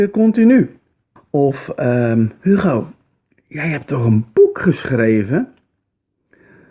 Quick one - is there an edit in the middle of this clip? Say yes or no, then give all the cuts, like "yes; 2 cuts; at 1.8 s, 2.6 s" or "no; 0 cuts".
yes; 1 cut; at 1.2 s